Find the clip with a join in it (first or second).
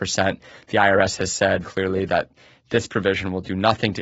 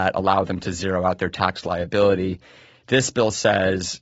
first